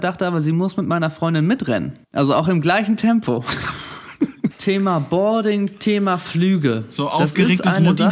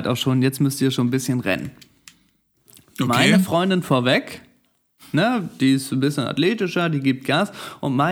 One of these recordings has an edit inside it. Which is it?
first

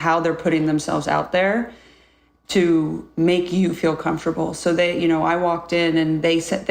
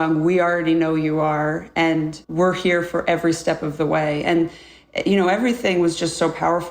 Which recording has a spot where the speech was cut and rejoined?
second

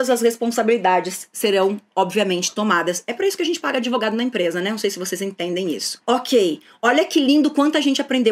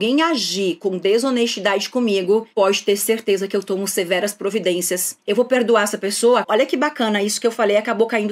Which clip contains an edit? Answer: second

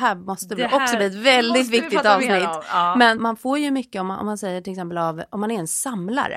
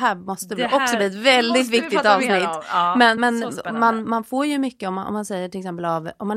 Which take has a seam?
first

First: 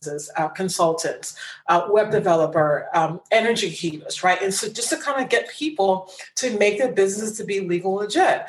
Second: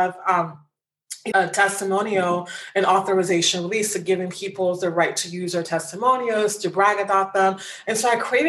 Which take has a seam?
second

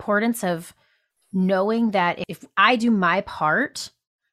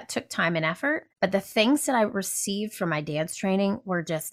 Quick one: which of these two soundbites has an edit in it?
second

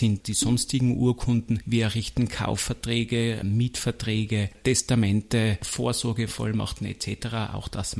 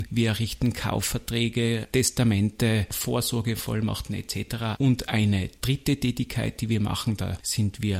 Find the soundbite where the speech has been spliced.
second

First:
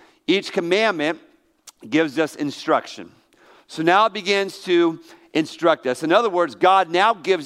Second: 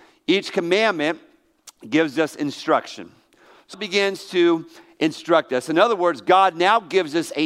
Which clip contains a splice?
second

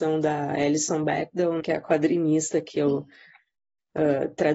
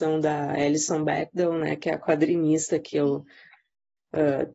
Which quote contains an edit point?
first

